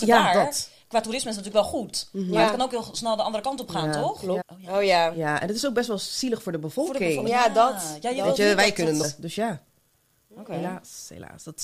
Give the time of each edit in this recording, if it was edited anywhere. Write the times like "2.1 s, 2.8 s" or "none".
4.4 s, 9.0 s